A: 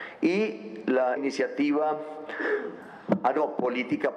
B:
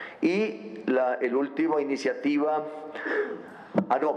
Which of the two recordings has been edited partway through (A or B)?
A